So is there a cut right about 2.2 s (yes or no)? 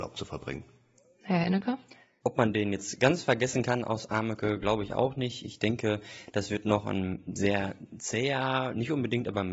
yes